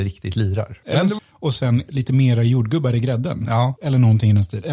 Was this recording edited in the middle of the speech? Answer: yes; 2 cuts; at 1.2 s, 3.8 s

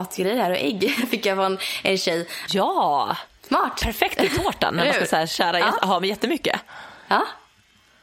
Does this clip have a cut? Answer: yes; 1 cut; at 2.5 s

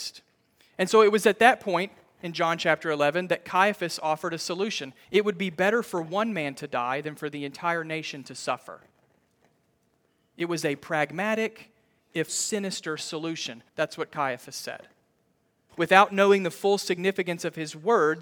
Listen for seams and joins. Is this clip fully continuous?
no; 3 cuts; at 12.3 s, 13.7 s, 15.7 s

